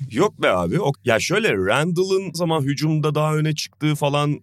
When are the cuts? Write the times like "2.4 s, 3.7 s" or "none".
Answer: 0.9 s, 2.3 s